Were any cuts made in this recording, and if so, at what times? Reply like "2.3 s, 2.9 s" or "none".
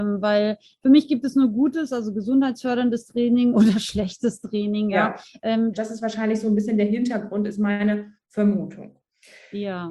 5.7 s